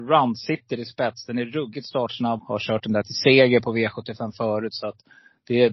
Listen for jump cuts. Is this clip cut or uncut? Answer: cut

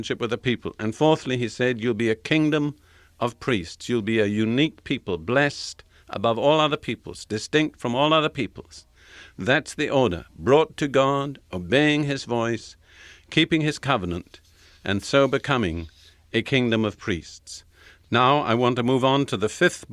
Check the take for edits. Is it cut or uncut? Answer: uncut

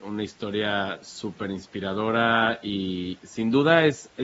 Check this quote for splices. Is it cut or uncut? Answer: cut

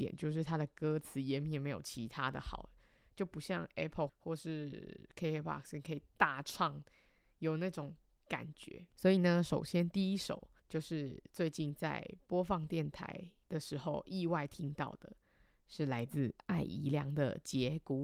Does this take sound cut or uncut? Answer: cut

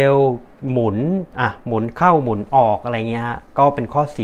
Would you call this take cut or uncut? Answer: cut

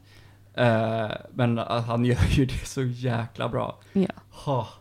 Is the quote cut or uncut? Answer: uncut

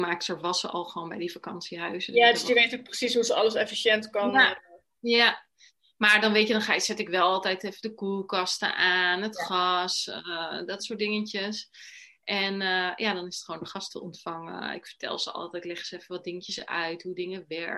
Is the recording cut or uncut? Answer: uncut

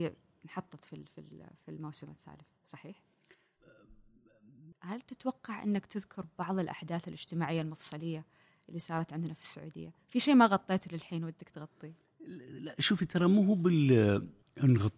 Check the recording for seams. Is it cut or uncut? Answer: cut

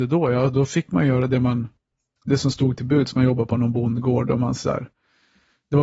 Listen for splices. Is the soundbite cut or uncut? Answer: uncut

